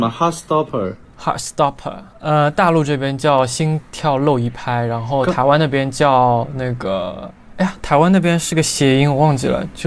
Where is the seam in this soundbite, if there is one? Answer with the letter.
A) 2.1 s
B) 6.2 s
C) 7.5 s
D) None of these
A